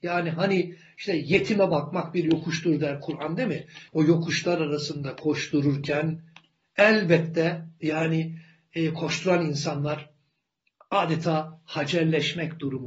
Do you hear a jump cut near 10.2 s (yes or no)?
no